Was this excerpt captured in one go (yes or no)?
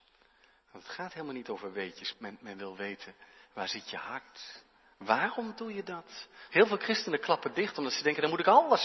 no